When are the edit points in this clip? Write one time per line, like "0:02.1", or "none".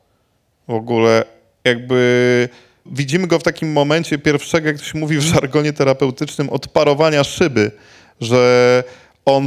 0:02.9